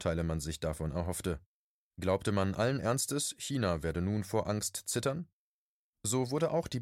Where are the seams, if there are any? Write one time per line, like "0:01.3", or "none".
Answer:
none